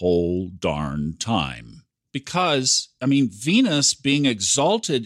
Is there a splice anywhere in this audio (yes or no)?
yes